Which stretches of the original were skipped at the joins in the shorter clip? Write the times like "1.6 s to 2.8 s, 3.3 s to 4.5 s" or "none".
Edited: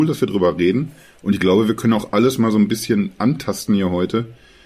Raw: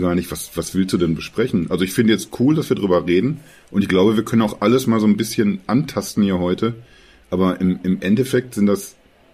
none